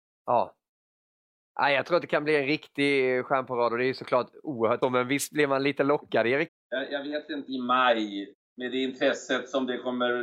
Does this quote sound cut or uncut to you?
cut